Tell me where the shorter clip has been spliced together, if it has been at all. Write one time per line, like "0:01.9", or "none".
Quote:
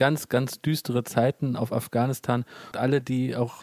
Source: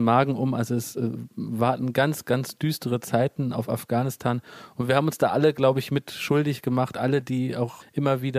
0:02.7